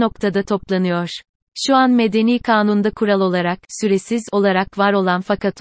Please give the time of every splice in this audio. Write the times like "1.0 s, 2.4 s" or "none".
none